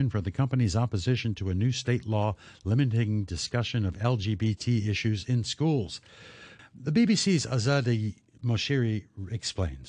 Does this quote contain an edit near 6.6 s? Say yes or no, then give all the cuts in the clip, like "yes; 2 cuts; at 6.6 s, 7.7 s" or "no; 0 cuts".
yes; 1 cut; at 6.6 s